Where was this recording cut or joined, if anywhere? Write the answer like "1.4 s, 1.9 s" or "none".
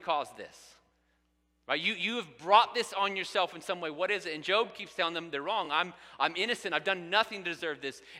none